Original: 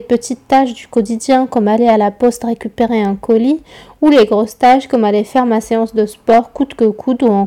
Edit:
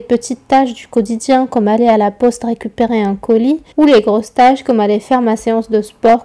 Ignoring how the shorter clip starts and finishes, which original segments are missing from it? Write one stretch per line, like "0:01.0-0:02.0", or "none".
0:03.7-0:03.9